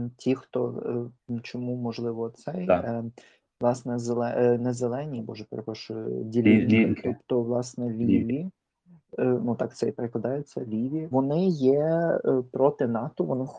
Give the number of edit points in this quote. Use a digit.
1